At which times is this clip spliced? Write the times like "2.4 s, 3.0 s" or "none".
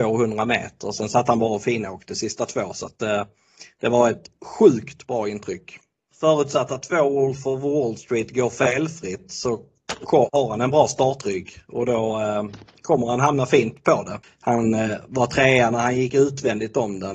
6.1 s, 14.2 s